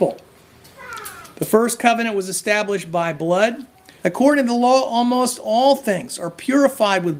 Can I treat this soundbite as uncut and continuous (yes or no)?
no